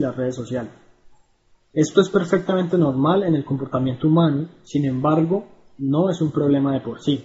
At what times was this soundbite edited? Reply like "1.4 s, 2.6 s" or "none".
1.6 s